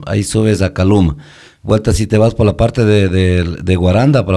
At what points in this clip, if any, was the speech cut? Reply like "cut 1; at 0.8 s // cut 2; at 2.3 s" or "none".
none